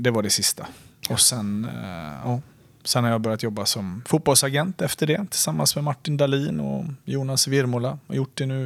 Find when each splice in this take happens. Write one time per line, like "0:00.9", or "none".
none